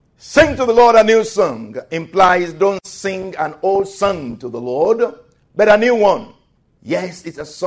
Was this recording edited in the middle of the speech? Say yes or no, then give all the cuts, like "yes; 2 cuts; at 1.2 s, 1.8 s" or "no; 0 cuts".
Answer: no; 0 cuts